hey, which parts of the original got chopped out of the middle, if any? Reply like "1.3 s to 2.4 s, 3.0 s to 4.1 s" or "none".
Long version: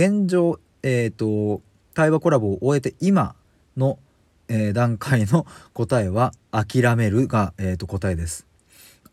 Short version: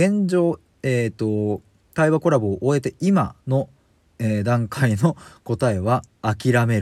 3.4 s to 3.7 s